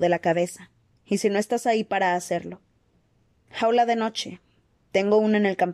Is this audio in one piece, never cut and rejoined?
no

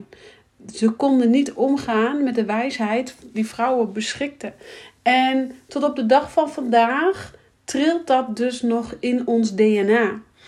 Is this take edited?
yes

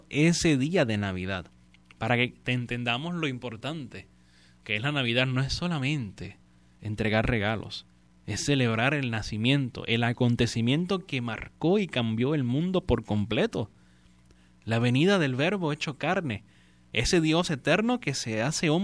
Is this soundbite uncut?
yes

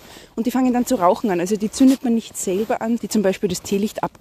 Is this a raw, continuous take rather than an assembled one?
no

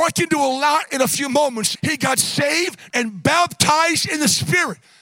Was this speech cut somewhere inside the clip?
yes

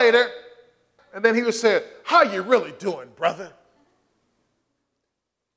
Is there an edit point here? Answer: yes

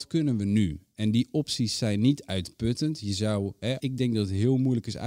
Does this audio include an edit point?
yes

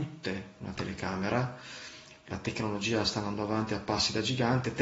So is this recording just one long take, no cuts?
yes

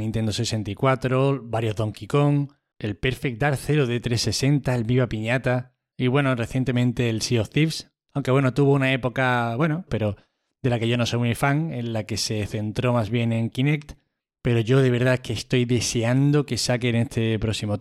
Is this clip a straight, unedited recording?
no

